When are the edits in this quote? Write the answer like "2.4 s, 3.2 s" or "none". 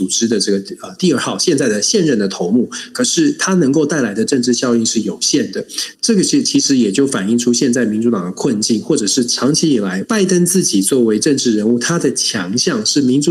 5.9 s, 10.0 s